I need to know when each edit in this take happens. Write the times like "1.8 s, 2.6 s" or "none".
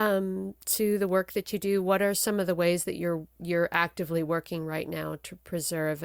none